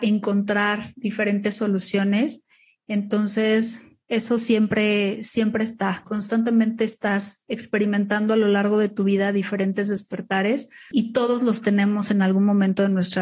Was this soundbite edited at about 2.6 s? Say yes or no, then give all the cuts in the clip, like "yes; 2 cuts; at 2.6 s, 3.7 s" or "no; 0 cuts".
no; 2 cuts; at 6.0 s, 10.9 s